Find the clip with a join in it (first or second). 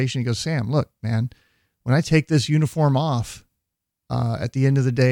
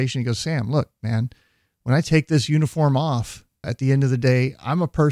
second